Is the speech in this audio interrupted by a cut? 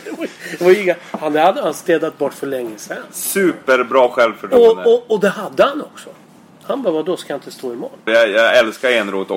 yes; 1 cut; at 8.1 s

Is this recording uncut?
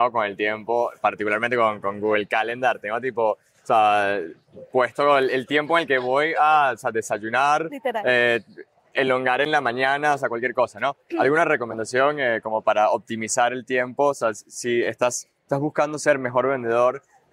yes; 0 cuts

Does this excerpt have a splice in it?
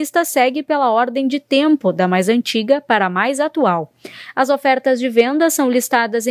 no; 0 cuts

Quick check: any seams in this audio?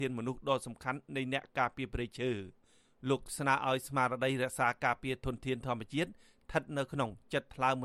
no; 0 cuts

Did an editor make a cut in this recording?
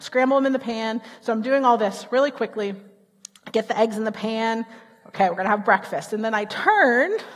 no; 0 cuts

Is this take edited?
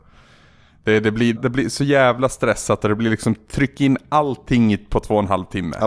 yes; 1 cut; at 1.4 s

